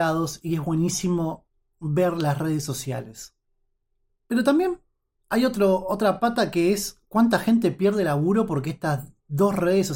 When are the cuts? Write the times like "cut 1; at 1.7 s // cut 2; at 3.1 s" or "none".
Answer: cut 1; at 4.1 s